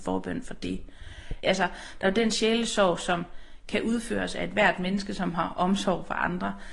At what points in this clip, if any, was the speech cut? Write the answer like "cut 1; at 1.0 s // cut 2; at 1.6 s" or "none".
cut 1; at 1.4 s